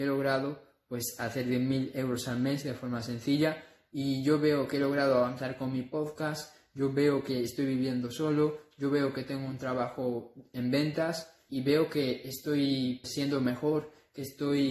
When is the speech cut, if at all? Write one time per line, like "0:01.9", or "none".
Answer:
0:11.5
0:13.0